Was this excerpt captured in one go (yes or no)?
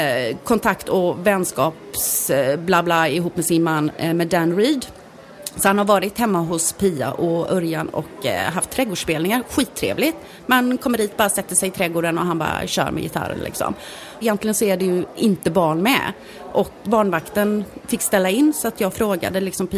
no